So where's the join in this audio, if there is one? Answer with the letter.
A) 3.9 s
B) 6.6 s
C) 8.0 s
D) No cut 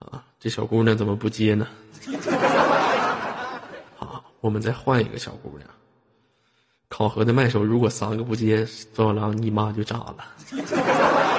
D